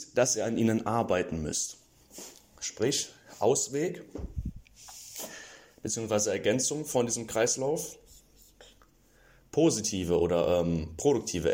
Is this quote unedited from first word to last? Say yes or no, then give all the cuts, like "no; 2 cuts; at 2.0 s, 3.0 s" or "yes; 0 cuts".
yes; 0 cuts